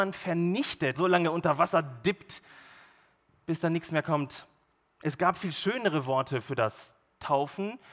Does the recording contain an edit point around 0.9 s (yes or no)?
yes